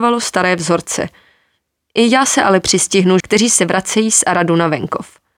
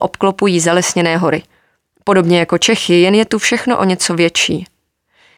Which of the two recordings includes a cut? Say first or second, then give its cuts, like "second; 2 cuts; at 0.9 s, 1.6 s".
first; 1 cut; at 3.2 s